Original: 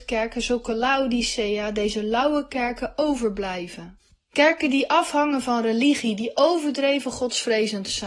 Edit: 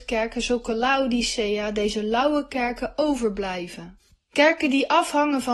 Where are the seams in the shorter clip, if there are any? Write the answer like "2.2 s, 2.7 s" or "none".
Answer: none